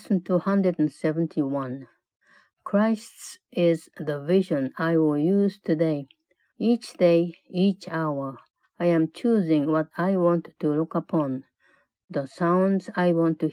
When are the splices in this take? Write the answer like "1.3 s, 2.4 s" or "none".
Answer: 6.5 s, 8.6 s